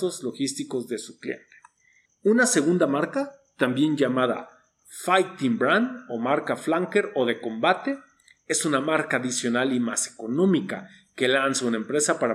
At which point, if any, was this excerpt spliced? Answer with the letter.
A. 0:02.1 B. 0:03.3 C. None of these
A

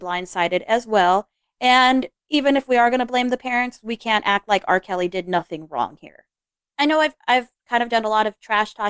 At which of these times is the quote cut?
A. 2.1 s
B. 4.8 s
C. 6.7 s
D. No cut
C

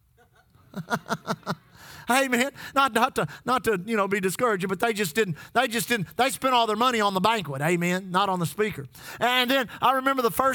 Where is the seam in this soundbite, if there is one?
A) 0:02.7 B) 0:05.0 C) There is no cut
C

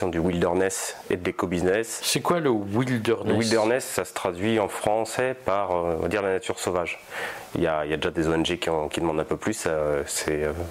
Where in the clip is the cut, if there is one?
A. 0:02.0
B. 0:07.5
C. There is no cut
B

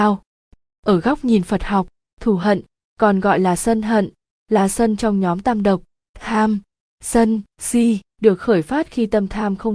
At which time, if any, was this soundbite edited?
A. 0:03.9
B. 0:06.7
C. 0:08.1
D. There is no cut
C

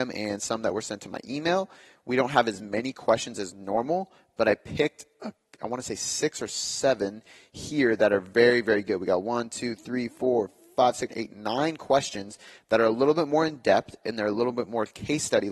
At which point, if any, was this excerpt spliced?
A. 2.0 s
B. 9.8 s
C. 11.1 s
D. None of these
C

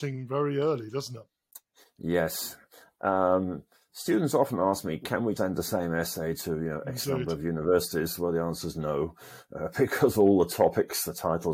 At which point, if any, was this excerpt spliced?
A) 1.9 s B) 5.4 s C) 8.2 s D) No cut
B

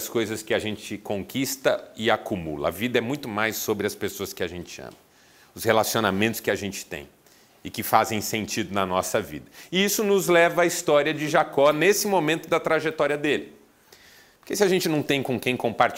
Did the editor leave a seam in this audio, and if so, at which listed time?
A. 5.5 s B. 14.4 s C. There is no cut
B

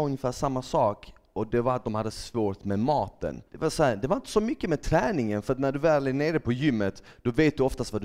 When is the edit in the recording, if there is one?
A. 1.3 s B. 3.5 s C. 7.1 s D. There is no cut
B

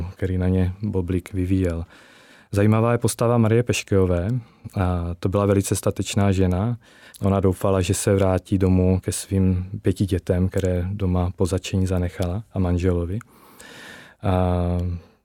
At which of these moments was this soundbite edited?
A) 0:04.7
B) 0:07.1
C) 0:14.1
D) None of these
B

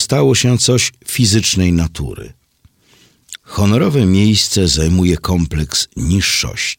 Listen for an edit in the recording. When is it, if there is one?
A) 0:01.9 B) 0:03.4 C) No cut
B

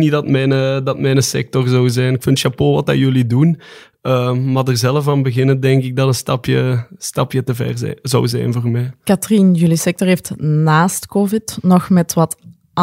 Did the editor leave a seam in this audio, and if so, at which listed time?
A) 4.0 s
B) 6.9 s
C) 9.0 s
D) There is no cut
D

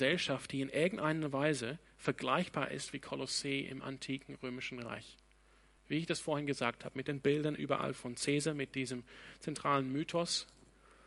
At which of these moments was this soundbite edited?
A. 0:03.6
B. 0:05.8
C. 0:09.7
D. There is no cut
D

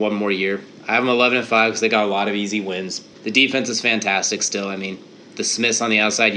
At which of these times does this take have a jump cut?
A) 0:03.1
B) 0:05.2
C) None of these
A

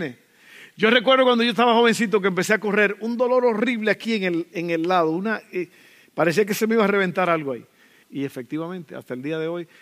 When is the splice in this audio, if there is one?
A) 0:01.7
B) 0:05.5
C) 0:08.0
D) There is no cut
C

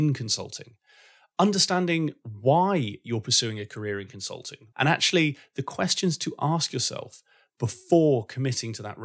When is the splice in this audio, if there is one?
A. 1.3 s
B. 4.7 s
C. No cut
B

